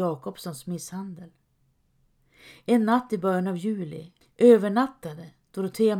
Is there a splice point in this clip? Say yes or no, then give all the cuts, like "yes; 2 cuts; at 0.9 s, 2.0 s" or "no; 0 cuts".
yes; 1 cut; at 4.2 s